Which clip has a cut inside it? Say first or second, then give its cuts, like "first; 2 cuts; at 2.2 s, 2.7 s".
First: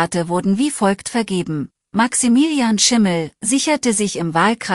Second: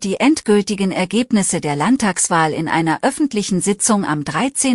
first; 1 cut; at 3.4 s